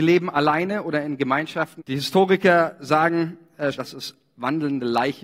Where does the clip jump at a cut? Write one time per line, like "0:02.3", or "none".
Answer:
0:01.8
0:03.7